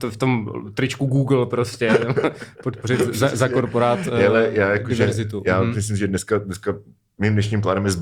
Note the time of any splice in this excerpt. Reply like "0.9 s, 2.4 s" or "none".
none